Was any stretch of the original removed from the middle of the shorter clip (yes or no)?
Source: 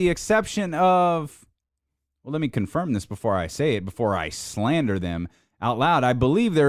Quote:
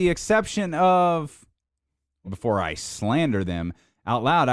yes